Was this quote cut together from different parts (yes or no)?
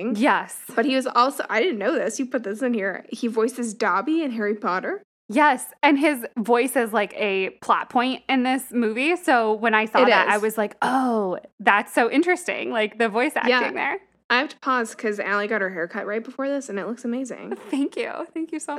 no